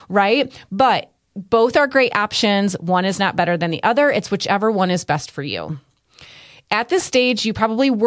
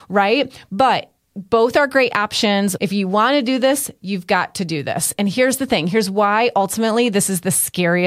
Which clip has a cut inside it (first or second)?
second